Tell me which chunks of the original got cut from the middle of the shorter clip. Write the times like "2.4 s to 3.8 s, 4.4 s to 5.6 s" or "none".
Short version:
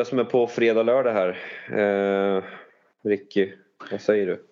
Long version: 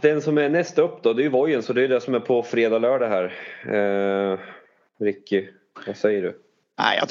none